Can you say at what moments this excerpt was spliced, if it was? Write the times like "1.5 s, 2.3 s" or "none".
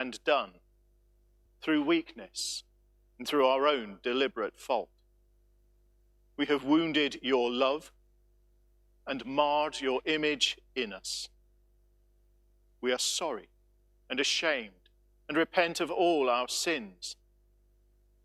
1.5 s